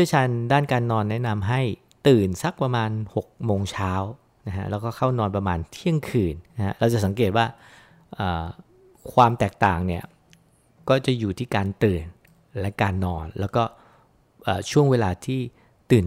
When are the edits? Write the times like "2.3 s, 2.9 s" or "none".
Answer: 6.5 s